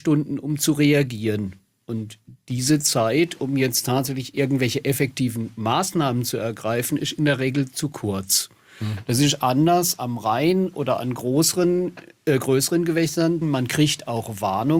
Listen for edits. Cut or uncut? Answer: cut